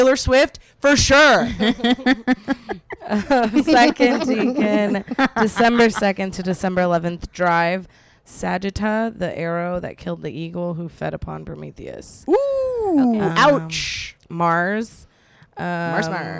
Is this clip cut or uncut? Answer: uncut